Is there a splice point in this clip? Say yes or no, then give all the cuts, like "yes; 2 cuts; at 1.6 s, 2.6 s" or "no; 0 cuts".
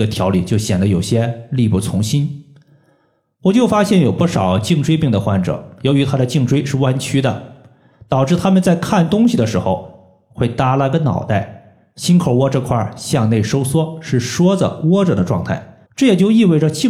yes; 1 cut; at 15.9 s